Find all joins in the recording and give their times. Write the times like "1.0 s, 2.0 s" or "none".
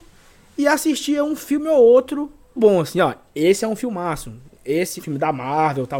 2.6 s, 5.0 s